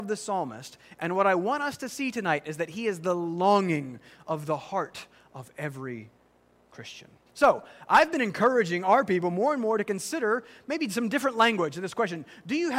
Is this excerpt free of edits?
no; 1 cut; at 7.3 s

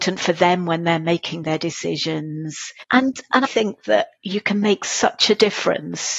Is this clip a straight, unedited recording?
no; 1 cut; at 3.5 s

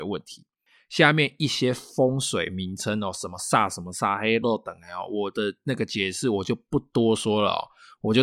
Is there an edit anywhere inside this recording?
yes; 1 cut; at 4.4 s

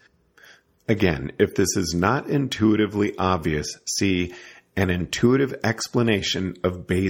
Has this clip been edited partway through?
no; 0 cuts

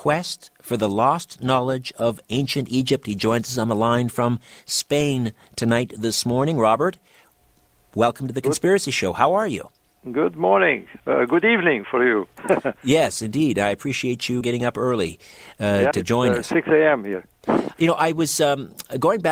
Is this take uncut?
no; 2 cuts; at 14.4 s, 15.9 s

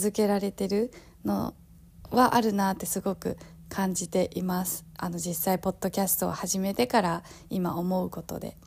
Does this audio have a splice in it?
no; 0 cuts

